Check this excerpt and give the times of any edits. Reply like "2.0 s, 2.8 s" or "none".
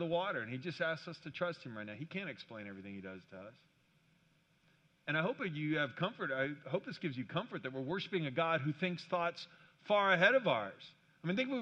none